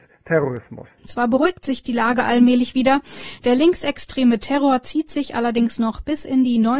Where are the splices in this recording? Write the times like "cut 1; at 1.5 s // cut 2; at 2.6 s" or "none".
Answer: cut 1; at 1.0 s

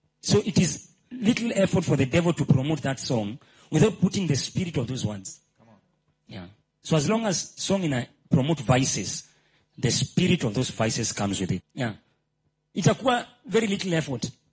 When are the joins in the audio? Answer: cut 1; at 11.6 s

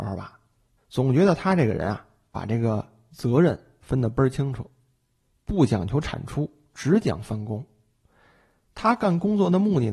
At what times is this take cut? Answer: none

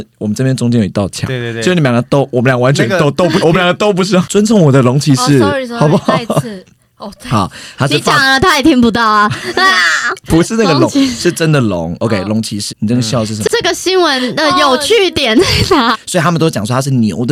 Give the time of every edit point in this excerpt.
cut 1; at 3.4 s // cut 2; at 12.7 s // cut 3; at 15.9 s

